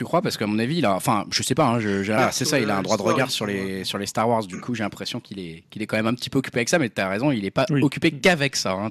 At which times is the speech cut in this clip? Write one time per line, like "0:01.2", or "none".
0:02.2